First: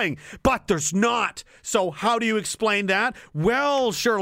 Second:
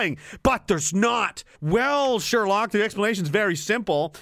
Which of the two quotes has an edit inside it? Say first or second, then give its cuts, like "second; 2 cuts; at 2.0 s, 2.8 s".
second; 1 cut; at 1.5 s